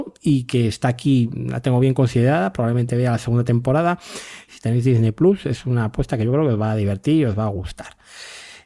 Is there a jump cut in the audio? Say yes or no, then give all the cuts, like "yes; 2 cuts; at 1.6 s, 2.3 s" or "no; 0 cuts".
yes; 1 cut; at 4.5 s